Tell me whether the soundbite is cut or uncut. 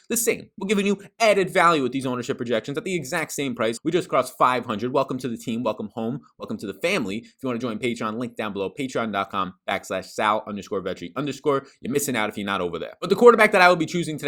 cut